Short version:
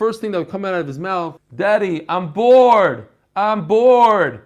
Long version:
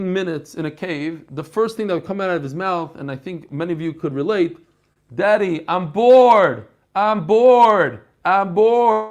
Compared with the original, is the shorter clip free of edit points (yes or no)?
no